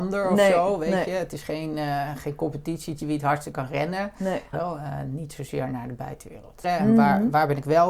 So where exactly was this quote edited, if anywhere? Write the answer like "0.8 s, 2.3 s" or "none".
4.5 s, 6.6 s